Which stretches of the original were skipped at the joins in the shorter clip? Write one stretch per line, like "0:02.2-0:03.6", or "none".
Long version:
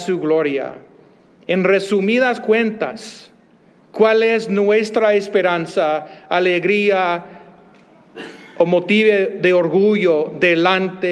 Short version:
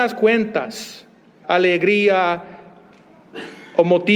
0:03.7-0:06.3